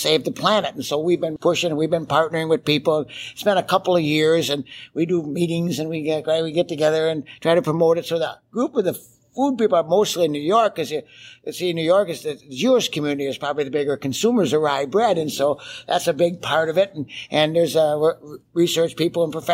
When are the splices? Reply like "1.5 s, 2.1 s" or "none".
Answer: 1.4 s

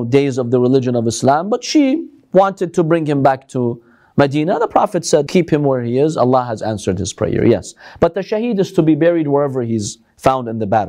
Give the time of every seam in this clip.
5.3 s

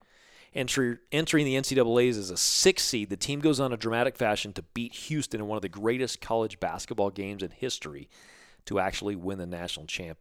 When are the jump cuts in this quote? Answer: none

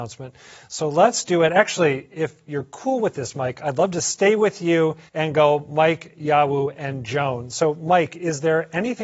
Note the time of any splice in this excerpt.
5.1 s

